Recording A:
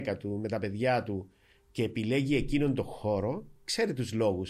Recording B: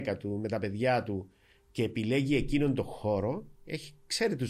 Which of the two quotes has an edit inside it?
A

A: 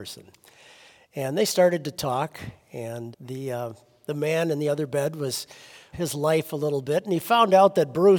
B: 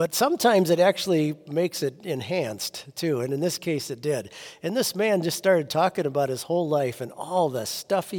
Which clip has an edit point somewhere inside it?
A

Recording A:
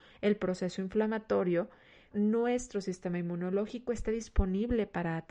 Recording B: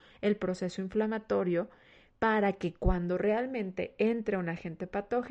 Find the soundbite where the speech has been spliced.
A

